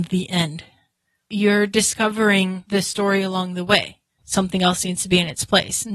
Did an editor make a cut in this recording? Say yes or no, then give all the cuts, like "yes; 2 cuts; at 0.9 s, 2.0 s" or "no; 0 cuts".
yes; 1 cut; at 4.2 s